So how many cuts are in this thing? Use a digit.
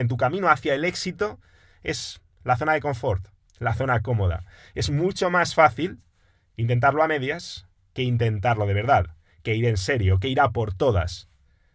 0